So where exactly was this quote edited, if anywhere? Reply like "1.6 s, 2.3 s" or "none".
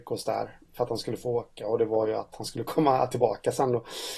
none